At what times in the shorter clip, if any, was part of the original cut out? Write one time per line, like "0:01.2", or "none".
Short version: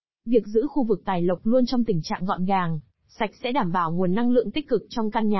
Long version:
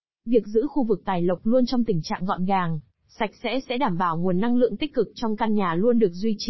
0:03.4